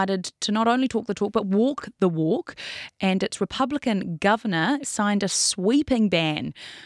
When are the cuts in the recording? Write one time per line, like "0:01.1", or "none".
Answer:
0:04.8